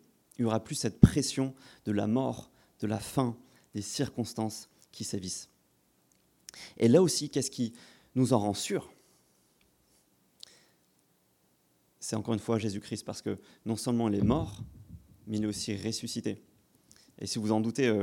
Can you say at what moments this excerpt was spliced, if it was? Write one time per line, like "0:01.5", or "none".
none